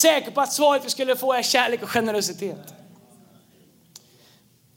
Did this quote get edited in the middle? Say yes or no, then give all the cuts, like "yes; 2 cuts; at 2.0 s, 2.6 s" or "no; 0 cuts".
no; 0 cuts